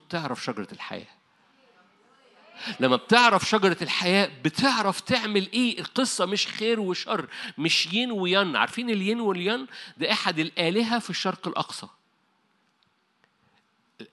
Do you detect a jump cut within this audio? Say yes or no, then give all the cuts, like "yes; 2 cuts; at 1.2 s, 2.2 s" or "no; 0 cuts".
no; 0 cuts